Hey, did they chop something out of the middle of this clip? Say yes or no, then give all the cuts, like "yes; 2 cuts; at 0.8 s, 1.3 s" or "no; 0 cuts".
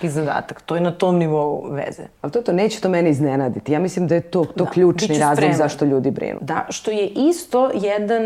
yes; 1 cut; at 6.4 s